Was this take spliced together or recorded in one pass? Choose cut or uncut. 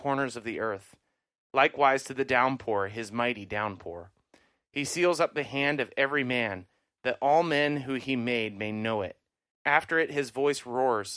cut